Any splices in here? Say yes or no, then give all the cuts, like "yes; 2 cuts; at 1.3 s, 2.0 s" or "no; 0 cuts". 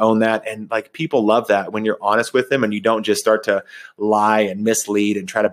no; 0 cuts